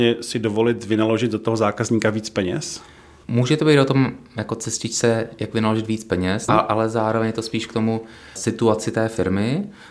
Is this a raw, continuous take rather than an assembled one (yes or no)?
no